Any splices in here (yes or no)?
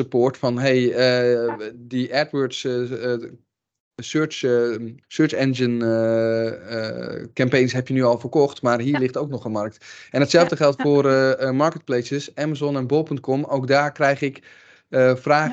yes